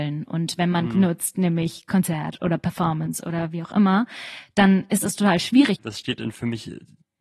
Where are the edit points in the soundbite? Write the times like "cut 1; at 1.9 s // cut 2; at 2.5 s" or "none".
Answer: cut 1; at 0.9 s // cut 2; at 5.8 s